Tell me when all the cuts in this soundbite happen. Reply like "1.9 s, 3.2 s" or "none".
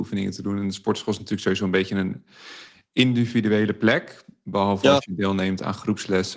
none

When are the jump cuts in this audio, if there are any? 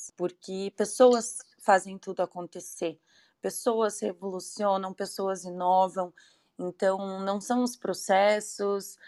none

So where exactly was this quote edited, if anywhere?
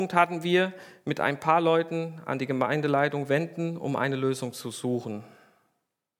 none

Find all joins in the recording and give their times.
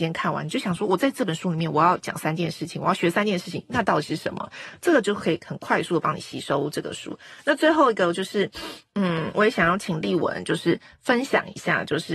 none

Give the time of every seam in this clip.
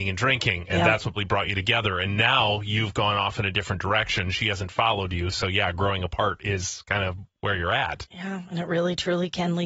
1.2 s

